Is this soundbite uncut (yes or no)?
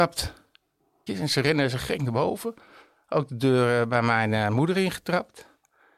no